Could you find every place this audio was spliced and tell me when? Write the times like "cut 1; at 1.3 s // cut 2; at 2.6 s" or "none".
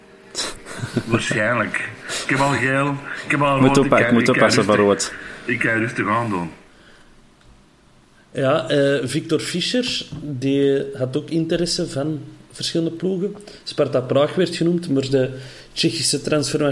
cut 1; at 2.2 s

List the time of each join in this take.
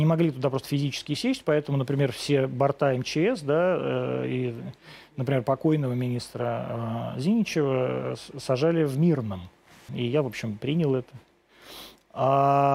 cut 1; at 9.9 s

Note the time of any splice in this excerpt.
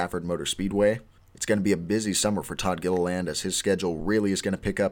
none

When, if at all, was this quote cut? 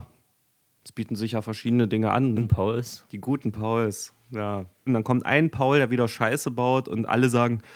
cut 1; at 2.4 s // cut 2; at 4.9 s

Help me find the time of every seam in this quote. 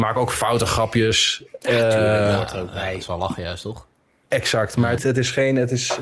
cut 1; at 5.0 s

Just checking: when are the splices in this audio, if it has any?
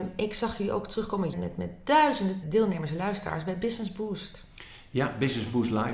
cut 1; at 1.3 s // cut 2; at 2.4 s

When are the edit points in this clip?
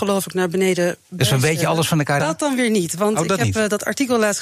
cut 1; at 2.2 s

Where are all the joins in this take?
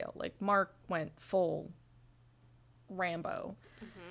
cut 1; at 2.7 s

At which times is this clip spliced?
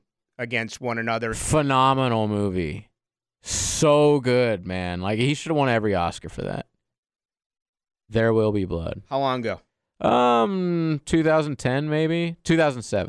cut 1; at 1.3 s

